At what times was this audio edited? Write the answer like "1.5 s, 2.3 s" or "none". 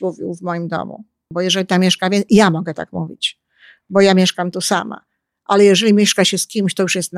1.3 s